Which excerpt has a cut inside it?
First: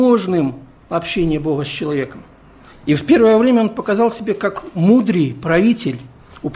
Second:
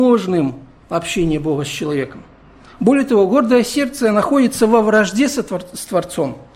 first; 1 cut; at 2.7 s

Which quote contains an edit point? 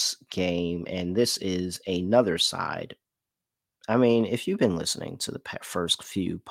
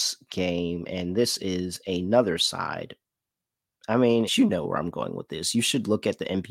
second; 1 cut; at 4.3 s

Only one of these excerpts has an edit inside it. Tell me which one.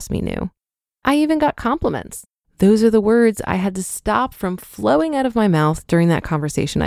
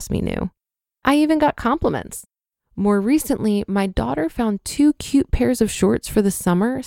first; 1 cut; at 2.4 s

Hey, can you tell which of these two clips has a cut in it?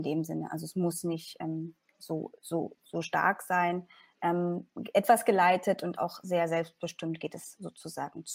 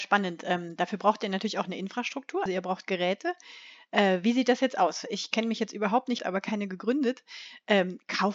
second; 2 cuts; at 2.5 s, 6.2 s

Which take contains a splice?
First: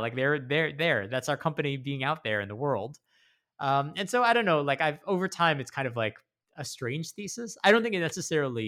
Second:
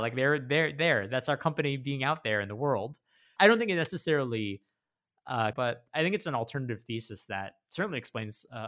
second; 2 cuts; at 3.4 s, 5.5 s

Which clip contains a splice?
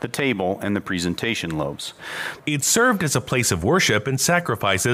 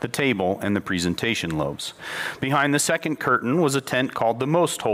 first; 1 cut; at 2.4 s

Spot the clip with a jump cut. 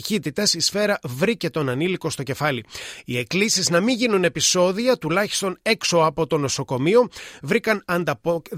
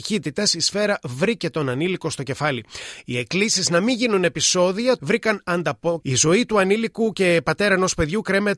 second; 2 cuts; at 5.0 s, 6.0 s

